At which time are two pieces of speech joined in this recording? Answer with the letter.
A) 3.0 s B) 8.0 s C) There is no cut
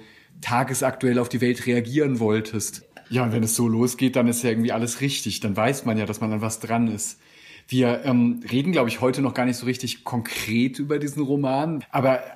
A